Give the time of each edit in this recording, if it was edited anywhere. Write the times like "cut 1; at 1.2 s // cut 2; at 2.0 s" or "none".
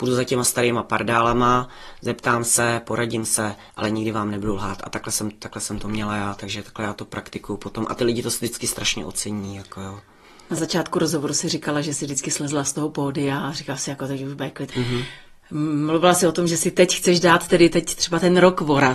cut 1; at 14.7 s